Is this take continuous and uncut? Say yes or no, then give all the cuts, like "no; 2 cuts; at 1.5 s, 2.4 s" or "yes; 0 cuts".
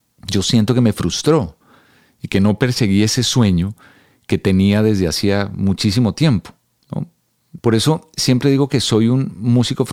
no; 1 cut; at 7.6 s